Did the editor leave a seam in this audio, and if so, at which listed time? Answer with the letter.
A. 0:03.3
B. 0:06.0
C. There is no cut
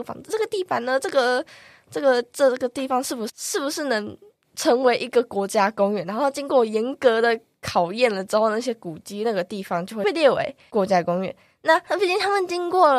A